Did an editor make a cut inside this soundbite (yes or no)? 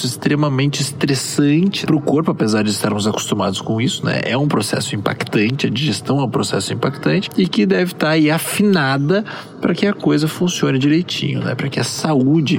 yes